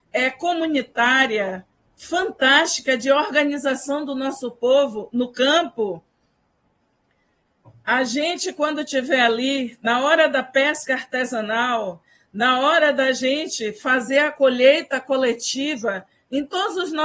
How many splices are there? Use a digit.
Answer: 0